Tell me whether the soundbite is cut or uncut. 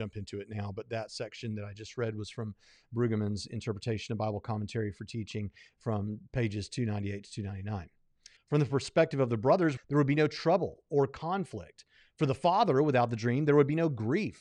cut